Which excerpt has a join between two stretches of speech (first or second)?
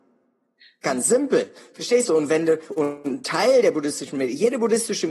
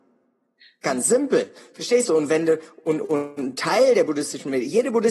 first